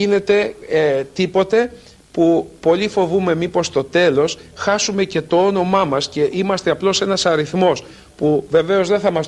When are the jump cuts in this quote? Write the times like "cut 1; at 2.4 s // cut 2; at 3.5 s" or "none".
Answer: none